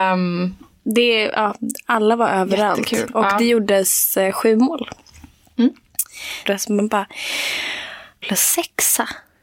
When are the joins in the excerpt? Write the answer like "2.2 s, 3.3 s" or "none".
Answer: 6.4 s, 8.2 s